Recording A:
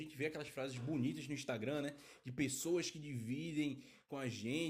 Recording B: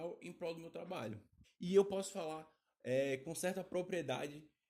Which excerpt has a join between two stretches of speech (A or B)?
B